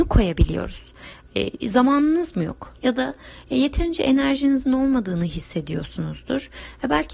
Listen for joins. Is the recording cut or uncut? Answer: cut